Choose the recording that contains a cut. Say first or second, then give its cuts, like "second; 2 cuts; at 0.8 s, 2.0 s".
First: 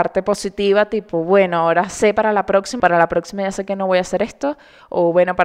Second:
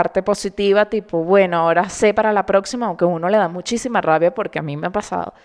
first; 1 cut; at 2.8 s